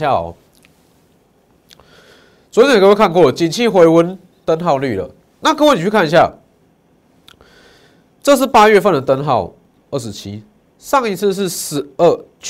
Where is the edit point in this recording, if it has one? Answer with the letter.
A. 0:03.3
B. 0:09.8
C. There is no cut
B